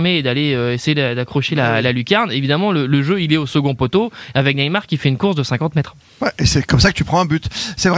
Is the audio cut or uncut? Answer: uncut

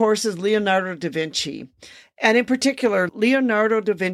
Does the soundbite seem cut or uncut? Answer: uncut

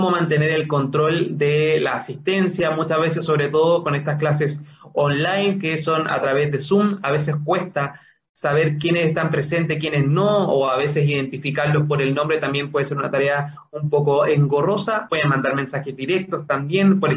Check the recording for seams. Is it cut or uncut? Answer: cut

